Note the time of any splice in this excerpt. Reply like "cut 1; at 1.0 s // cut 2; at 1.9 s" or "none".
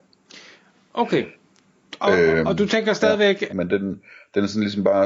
cut 1; at 3.5 s